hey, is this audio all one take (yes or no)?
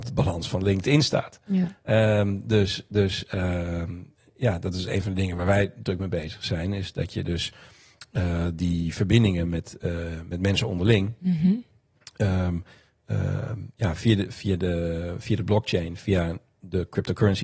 yes